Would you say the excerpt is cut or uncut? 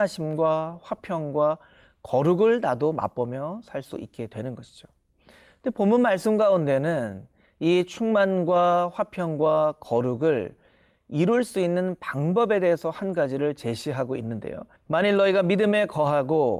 cut